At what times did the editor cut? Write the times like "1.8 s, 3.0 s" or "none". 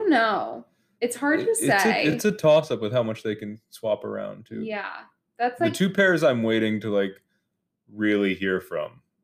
none